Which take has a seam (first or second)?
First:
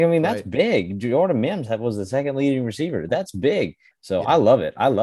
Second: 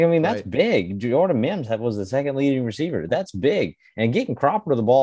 first